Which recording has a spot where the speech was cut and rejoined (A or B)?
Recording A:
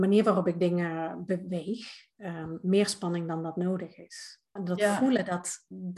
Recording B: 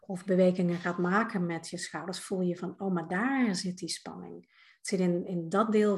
A